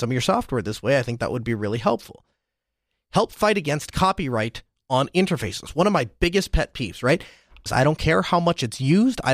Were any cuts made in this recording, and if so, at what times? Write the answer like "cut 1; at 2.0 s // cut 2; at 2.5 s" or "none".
cut 1; at 7.7 s